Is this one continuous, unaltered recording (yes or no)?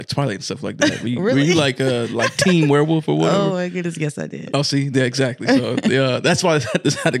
yes